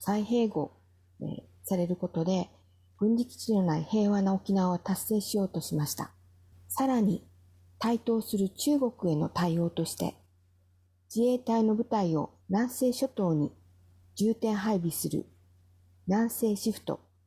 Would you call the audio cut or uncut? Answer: cut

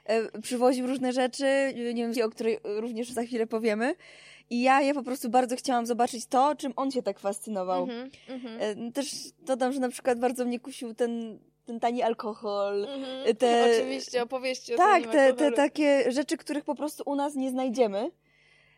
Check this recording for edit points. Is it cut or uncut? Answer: cut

